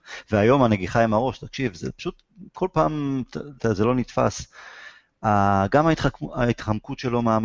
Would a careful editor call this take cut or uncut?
cut